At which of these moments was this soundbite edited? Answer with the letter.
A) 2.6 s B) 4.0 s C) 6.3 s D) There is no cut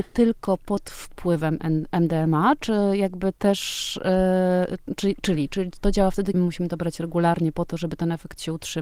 C